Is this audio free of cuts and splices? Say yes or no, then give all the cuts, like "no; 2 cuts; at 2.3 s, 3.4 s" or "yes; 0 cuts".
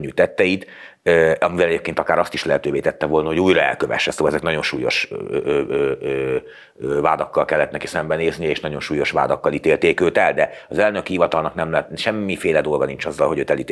yes; 0 cuts